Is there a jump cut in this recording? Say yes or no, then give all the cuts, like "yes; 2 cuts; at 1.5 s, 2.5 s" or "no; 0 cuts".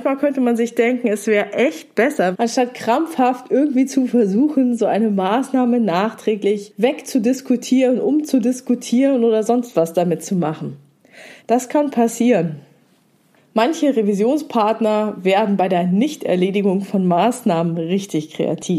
yes; 2 cuts; at 2.3 s, 11.4 s